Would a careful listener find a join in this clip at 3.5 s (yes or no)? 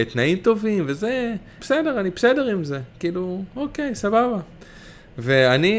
no